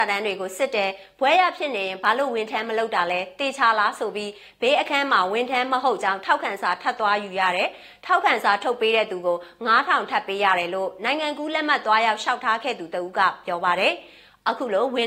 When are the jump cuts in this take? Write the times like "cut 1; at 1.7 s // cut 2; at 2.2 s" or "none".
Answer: none